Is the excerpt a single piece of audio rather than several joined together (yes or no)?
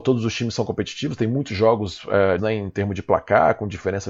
no